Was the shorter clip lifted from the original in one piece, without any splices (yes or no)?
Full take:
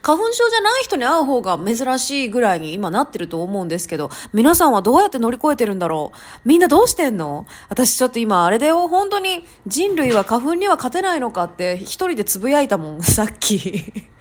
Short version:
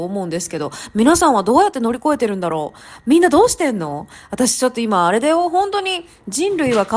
yes